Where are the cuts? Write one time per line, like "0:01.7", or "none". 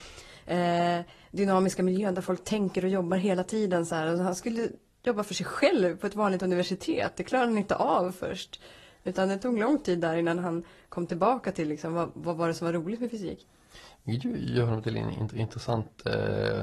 none